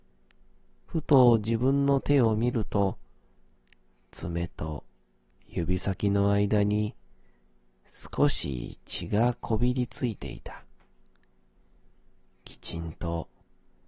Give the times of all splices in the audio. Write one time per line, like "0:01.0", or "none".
none

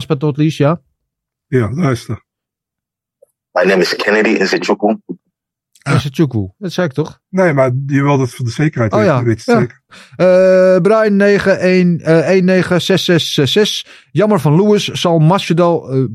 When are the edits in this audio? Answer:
0:07.2
0:09.9

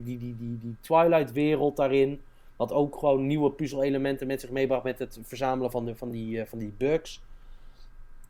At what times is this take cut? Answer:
none

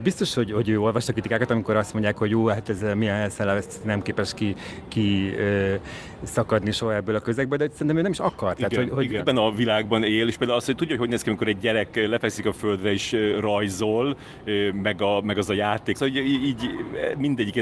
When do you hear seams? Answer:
0:09.2
0:15.9

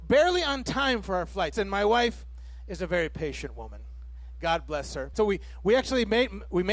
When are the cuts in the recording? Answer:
0:01.5
0:05.1

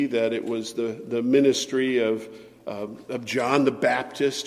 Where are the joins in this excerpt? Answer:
none

